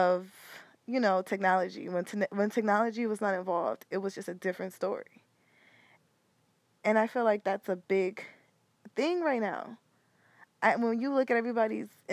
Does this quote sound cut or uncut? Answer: uncut